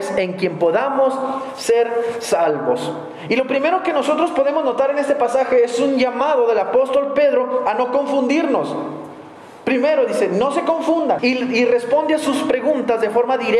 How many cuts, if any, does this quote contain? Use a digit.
1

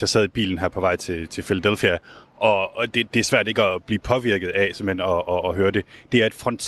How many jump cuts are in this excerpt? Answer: 0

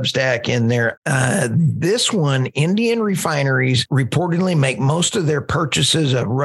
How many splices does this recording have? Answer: 1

